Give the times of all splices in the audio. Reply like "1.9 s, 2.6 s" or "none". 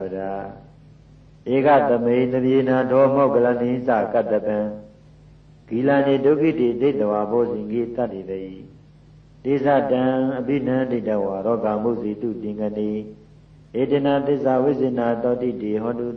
8.1 s